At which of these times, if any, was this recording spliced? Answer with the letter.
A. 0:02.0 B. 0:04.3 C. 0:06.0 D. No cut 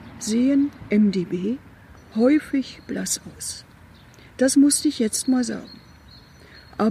A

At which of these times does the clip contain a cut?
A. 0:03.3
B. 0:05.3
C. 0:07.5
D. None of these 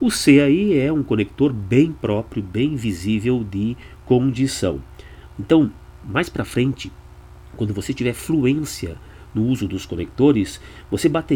B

